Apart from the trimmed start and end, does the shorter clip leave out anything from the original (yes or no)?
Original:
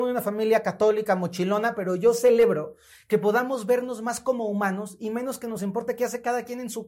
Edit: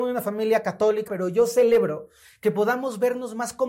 yes